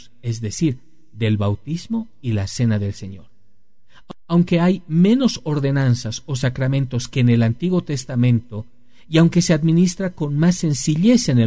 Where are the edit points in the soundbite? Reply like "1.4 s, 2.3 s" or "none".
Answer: none